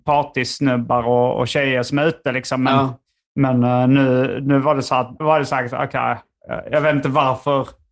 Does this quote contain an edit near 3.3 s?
no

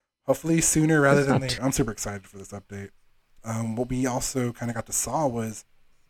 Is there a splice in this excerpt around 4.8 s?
no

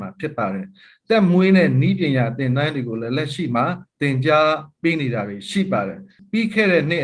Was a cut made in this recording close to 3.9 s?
yes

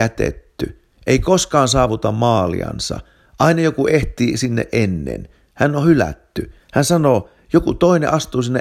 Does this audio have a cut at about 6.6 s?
no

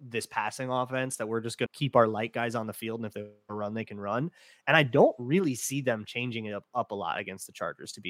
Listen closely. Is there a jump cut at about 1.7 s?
yes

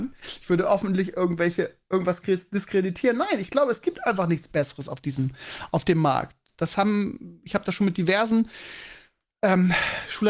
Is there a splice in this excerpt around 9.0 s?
no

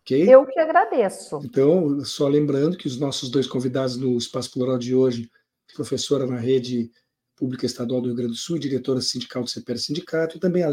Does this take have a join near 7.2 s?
no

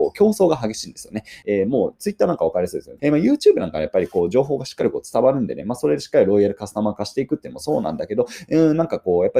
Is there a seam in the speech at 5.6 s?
no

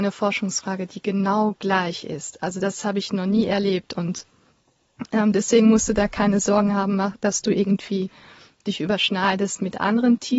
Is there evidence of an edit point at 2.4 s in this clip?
no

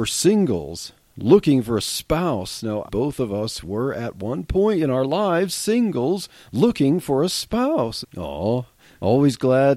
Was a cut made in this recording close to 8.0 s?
yes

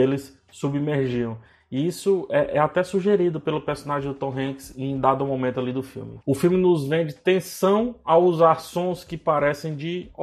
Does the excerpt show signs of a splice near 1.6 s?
no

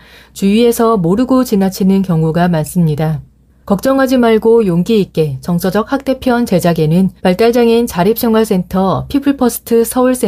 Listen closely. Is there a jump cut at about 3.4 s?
no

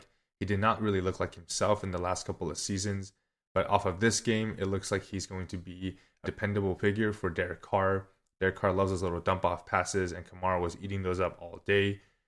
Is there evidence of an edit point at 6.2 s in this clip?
yes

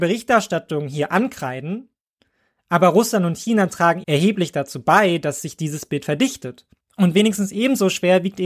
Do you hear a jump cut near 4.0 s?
yes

